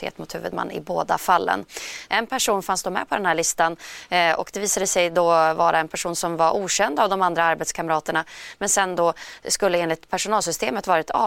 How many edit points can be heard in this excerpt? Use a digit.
1